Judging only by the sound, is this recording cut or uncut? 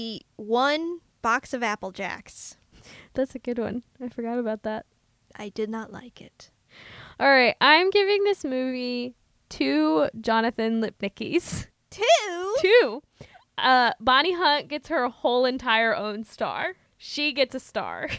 cut